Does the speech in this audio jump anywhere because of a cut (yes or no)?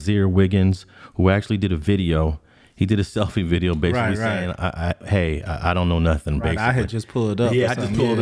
no